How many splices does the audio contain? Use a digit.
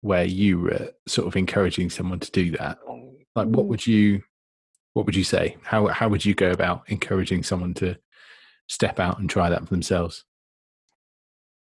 0